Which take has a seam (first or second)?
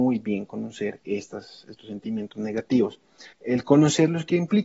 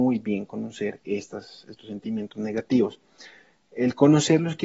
first